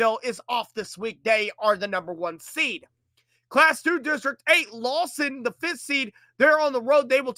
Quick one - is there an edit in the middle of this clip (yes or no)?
no